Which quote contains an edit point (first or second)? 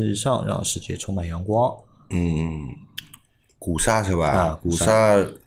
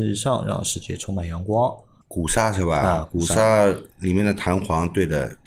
second